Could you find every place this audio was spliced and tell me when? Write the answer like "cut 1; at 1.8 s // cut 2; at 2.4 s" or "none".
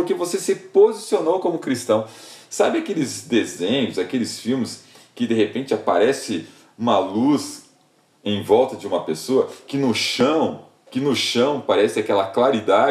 cut 1; at 10.9 s